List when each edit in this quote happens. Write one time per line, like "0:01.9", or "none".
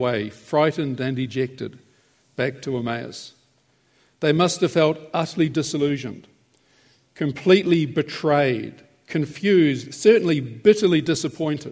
none